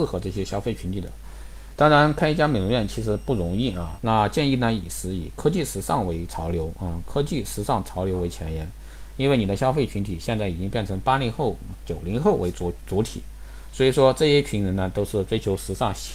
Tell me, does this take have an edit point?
yes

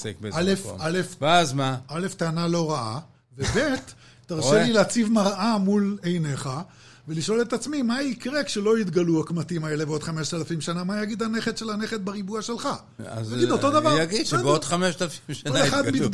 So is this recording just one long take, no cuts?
yes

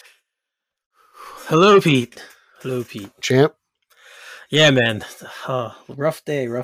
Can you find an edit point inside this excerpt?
no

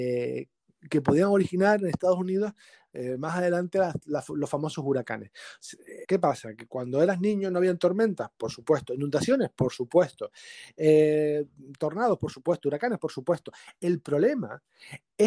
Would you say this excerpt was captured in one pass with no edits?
no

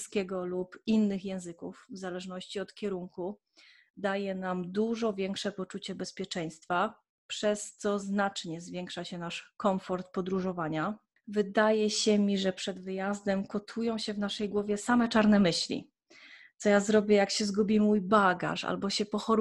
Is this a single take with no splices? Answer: yes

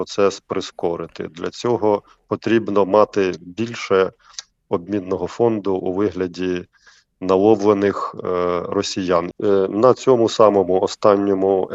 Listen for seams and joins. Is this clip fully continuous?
no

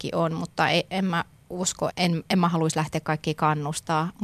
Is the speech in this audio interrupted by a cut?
yes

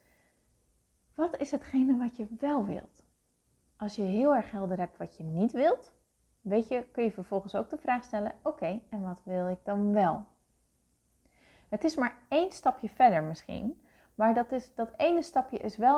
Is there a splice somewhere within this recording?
no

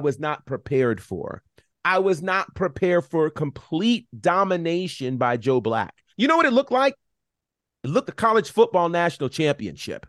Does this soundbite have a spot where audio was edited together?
yes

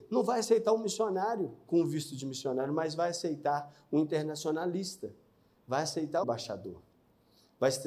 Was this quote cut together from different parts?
yes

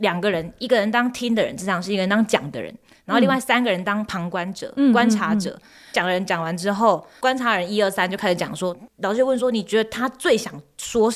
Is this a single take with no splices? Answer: yes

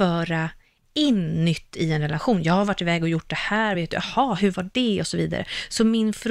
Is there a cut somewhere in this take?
no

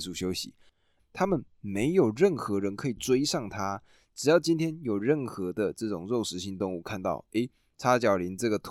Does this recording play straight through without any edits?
no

